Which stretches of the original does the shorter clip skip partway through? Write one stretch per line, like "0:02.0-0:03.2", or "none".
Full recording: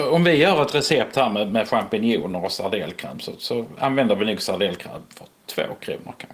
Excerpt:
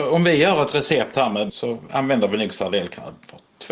0:01.5-0:03.4